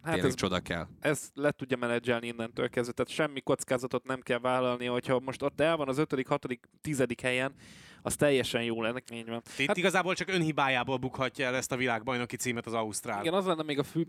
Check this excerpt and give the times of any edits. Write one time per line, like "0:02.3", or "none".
0:06.8
0:09.0